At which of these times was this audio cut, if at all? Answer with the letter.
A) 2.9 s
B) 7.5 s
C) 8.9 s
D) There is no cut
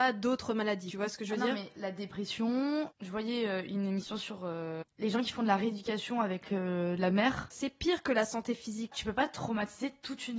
B